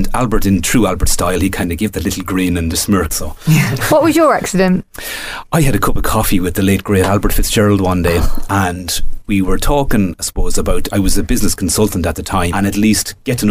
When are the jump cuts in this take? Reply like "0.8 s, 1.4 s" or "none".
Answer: 3.1 s, 12.5 s